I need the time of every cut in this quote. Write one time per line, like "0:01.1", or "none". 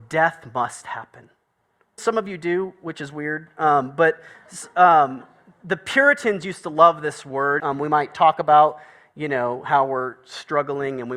0:02.0
0:07.6